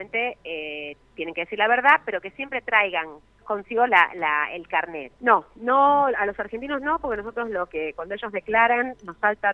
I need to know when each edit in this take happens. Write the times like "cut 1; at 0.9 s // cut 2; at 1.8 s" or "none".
cut 1; at 3.4 s // cut 2; at 5.2 s